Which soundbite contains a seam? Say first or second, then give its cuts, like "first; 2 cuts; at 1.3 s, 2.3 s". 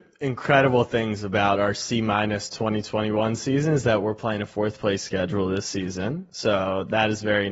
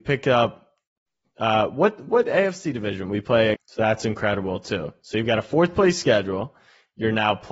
second; 1 cut; at 3.5 s